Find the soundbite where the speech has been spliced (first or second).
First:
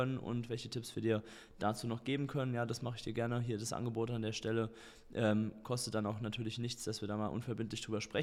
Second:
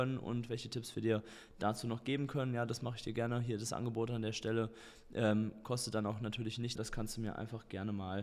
second